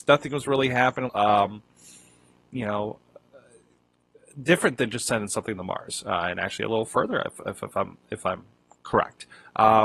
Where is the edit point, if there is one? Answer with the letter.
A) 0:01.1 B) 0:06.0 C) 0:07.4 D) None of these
A